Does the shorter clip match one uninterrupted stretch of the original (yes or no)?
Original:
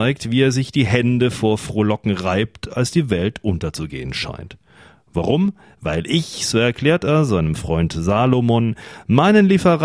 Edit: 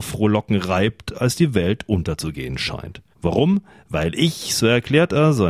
no